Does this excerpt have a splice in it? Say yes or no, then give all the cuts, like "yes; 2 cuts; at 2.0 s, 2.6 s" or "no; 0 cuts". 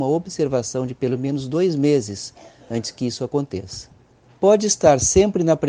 yes; 1 cut; at 4.2 s